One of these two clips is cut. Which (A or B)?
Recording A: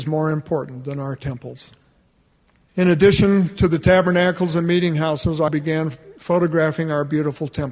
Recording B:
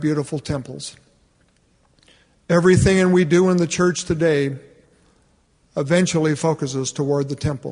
A